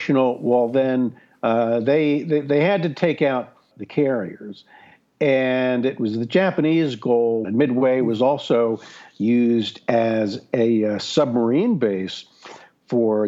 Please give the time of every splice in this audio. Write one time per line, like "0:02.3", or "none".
0:03.7
0:07.4